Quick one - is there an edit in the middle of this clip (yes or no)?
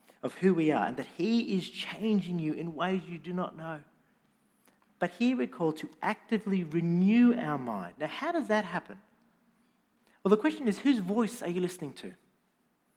no